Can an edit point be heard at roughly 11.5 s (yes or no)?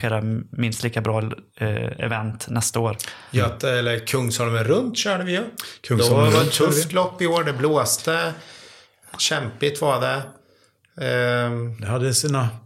no